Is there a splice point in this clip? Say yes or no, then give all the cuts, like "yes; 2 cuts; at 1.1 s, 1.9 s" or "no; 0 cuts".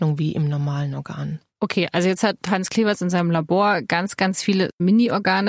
no; 0 cuts